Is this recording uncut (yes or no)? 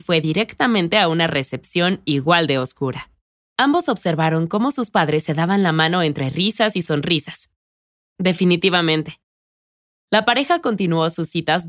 no